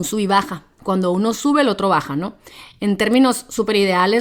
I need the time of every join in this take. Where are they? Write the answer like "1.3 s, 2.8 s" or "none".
none